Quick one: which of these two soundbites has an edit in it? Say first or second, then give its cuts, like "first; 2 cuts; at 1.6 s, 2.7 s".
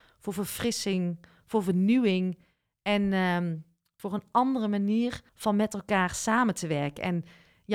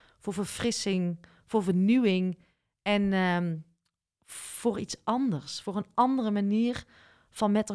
first; 2 cuts; at 4.0 s, 5.3 s